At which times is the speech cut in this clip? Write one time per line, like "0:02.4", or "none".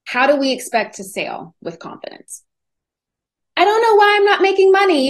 0:03.4